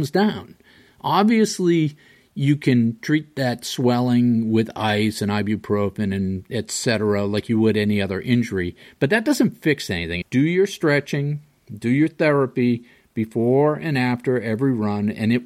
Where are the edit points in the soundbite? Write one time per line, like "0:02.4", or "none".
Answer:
0:10.2